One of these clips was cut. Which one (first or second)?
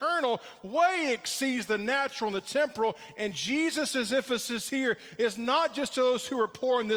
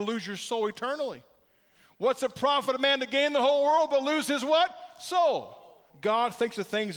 second